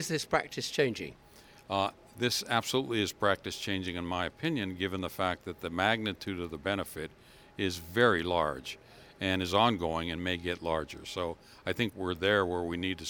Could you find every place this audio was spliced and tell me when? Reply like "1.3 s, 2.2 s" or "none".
11.9 s